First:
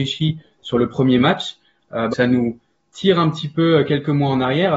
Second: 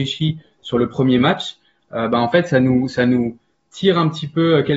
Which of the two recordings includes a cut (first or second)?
first